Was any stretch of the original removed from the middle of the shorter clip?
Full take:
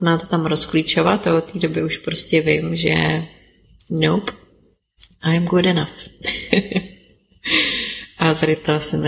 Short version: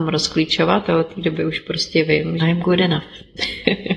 yes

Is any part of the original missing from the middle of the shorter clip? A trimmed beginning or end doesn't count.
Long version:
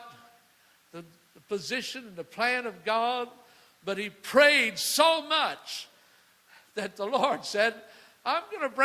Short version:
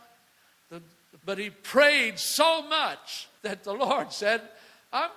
yes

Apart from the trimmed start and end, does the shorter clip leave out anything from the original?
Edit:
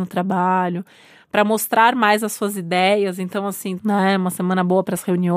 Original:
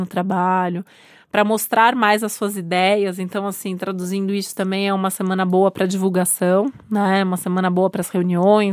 yes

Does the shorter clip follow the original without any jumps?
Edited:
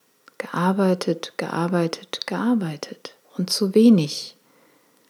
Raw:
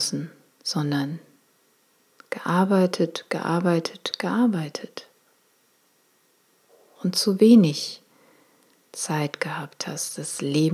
no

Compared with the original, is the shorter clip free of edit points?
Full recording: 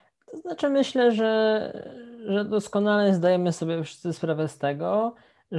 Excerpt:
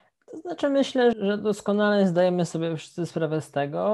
no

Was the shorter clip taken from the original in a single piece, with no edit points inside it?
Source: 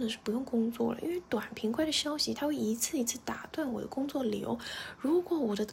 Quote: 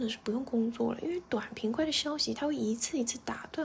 yes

